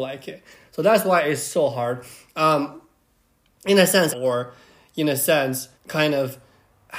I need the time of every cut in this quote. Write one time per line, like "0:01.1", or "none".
0:04.1
0:05.7